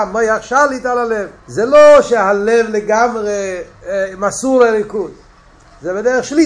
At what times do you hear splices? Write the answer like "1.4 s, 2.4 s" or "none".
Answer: 1.4 s, 3.7 s